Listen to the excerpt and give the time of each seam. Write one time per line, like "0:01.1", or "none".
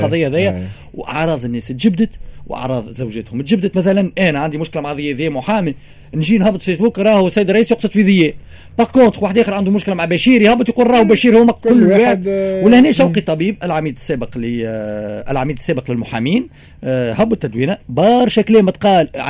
none